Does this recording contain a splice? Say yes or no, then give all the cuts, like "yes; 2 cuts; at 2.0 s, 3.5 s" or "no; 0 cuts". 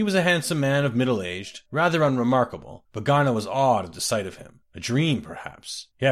no; 0 cuts